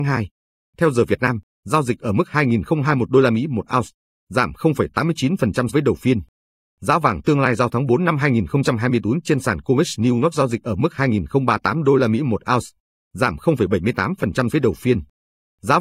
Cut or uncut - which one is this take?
cut